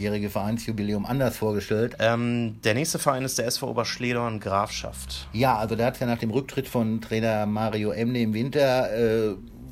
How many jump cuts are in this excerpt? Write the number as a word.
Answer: one